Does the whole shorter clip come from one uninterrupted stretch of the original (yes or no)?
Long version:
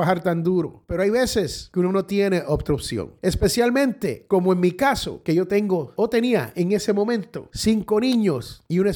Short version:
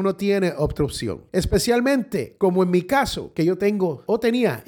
yes